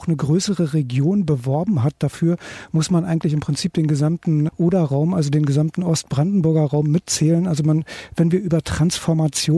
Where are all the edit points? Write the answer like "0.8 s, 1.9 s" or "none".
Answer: 4.5 s